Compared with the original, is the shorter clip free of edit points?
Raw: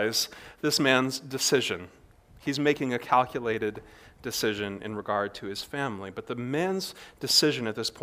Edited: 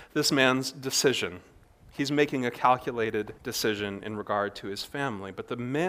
no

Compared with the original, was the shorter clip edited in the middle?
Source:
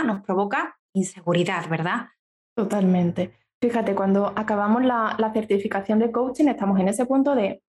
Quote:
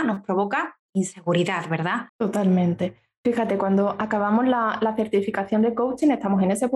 yes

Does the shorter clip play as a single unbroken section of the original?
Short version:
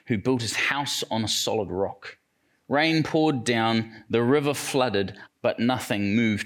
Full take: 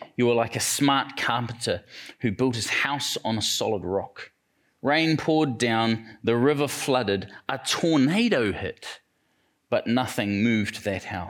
no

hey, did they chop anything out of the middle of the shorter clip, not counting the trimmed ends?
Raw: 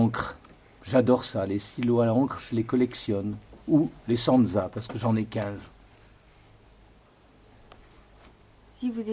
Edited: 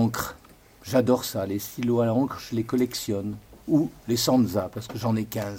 no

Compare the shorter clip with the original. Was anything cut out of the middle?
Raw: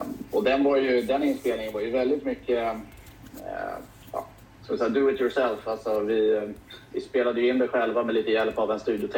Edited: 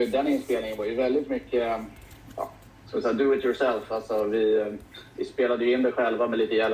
yes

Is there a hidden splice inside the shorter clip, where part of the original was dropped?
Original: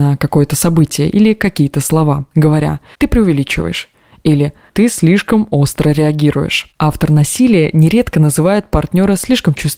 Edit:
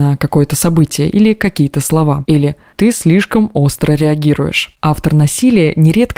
yes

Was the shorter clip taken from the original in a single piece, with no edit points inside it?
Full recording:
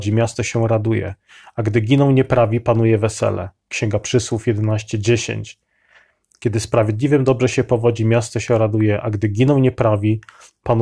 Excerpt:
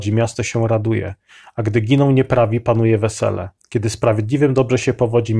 no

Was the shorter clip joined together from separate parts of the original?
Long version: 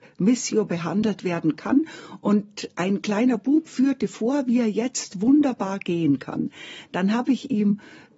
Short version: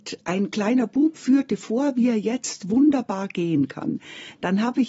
no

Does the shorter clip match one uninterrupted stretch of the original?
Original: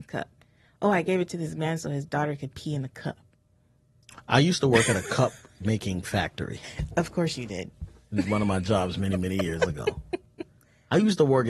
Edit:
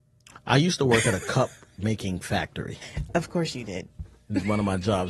yes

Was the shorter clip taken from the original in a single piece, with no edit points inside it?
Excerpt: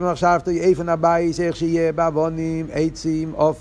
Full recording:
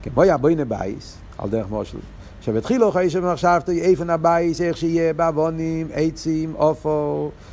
yes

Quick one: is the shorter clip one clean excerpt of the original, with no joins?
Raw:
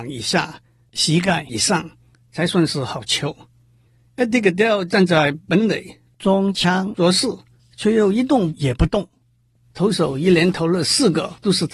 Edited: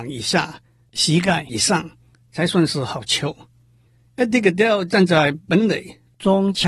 yes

